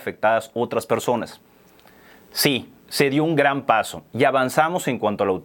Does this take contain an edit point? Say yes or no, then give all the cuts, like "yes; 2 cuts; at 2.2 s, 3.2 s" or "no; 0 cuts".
no; 0 cuts